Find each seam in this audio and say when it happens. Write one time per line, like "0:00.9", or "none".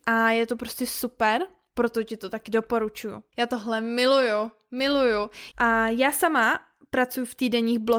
0:03.3
0:05.5